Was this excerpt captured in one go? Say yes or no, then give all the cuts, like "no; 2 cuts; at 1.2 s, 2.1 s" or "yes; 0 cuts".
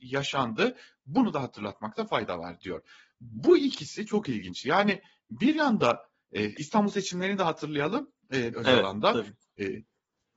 no; 1 cut; at 8.5 s